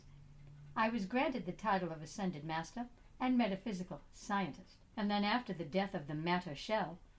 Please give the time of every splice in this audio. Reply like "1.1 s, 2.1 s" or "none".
3.2 s, 4.9 s

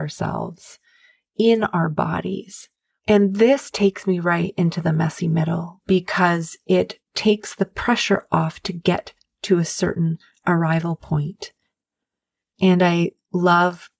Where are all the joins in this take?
3.0 s, 12.5 s

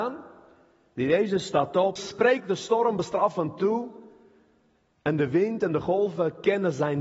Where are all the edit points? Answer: 2.0 s

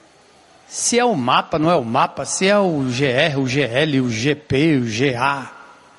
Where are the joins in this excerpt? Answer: none

